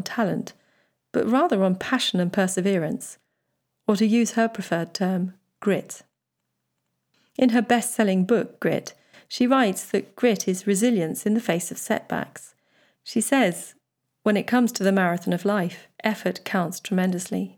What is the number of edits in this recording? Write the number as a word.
two